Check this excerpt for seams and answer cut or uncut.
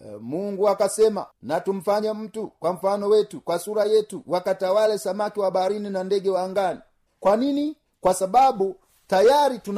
cut